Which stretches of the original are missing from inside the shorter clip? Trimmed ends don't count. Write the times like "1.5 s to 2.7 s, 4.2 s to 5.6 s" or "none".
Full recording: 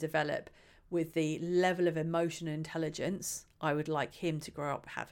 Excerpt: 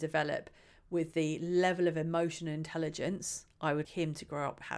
3.8 s to 4.1 s